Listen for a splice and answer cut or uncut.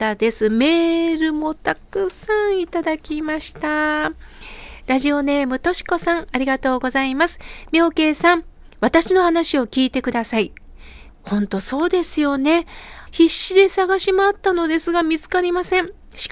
cut